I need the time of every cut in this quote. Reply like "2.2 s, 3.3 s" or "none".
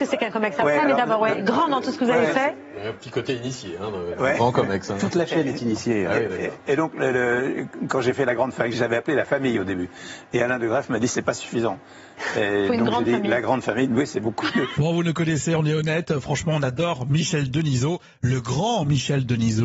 6.7 s, 8.7 s, 14.7 s